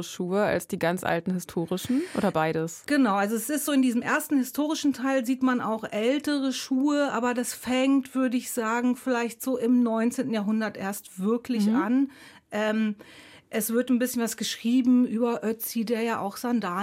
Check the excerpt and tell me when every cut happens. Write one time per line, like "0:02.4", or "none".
none